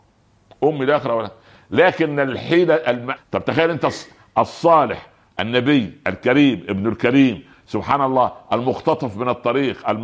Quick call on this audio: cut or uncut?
cut